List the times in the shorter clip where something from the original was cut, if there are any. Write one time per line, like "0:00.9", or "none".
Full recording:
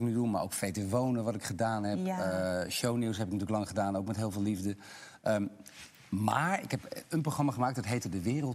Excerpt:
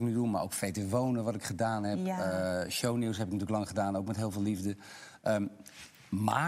none